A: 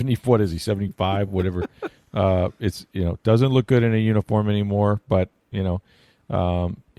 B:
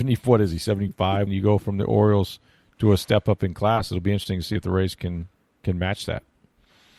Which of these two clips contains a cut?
B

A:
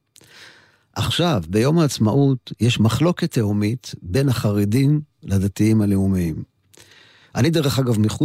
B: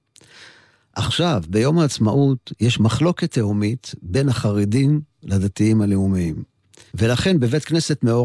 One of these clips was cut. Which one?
B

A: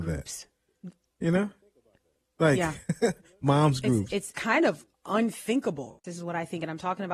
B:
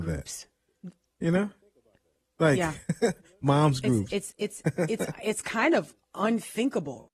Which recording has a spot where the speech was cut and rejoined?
A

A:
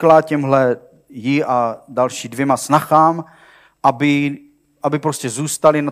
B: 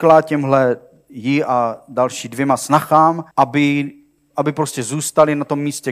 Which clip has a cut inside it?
B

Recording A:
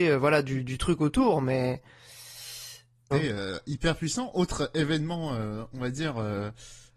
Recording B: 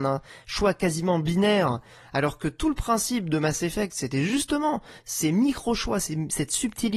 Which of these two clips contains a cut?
A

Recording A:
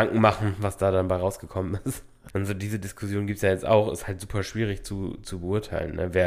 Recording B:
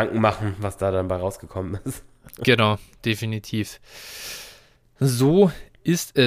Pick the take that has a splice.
A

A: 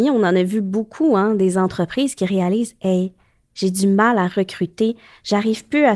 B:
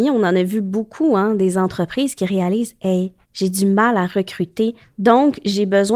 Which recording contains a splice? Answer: B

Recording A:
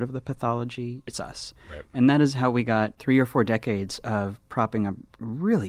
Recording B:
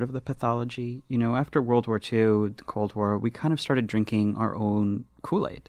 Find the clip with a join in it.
A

